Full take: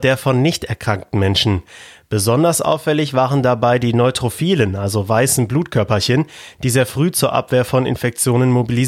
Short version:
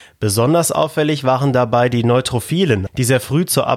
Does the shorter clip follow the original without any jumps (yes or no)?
no